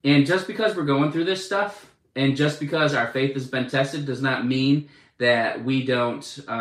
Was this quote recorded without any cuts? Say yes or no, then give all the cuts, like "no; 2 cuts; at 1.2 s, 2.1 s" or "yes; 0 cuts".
yes; 0 cuts